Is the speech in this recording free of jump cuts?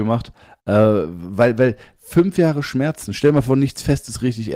yes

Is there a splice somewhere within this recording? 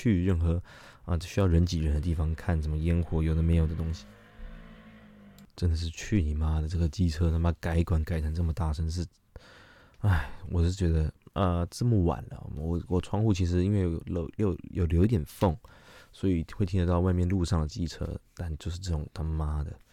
no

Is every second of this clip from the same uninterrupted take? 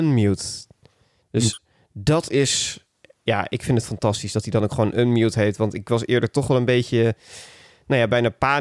yes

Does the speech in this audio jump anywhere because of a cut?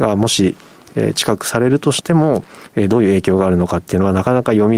no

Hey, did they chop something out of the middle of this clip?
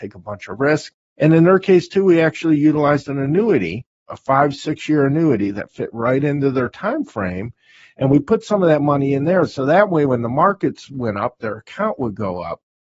no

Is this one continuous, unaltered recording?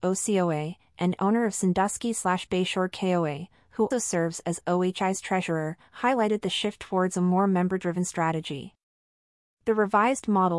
no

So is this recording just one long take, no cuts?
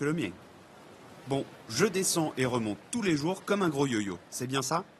yes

